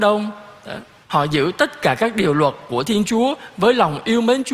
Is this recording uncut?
no; 1 cut; at 1.0 s

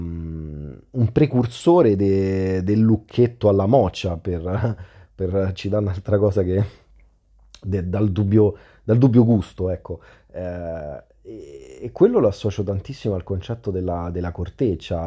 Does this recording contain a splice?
no; 0 cuts

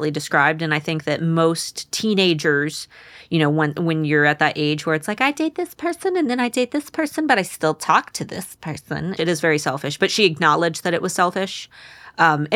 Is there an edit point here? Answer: yes; 1 cut; at 9.2 s

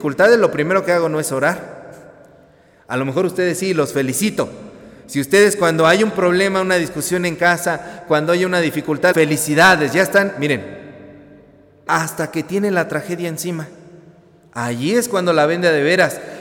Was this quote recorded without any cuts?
no; 2 cuts; at 9.1 s, 11.9 s

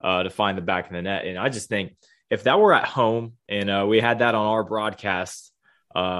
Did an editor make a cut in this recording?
no; 0 cuts

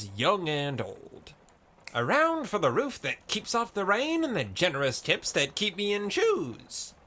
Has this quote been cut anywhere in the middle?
no; 0 cuts

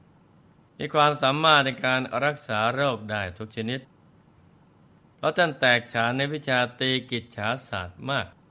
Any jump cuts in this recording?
no; 0 cuts

